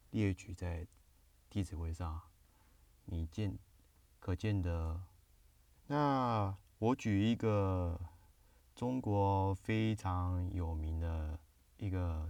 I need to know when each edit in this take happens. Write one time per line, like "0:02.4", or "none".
0:05.8